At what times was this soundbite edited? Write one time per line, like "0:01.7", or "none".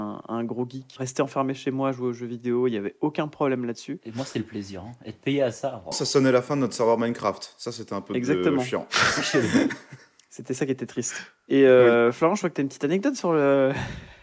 0:01.0
0:05.9